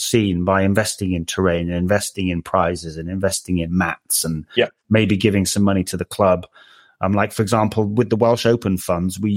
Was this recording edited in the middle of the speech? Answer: no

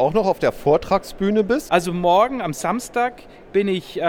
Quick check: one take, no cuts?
no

